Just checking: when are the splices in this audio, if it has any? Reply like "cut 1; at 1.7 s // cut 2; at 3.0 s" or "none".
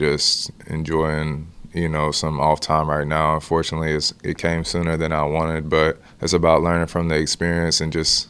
none